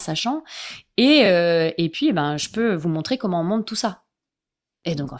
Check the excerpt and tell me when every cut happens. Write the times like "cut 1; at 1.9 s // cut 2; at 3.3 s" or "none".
none